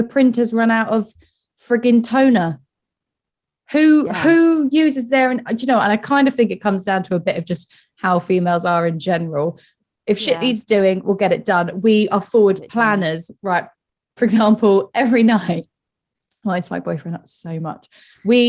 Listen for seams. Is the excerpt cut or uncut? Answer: cut